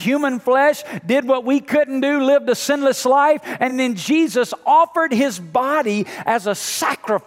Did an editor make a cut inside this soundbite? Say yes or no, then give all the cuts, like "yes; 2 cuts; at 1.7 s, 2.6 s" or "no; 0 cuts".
no; 0 cuts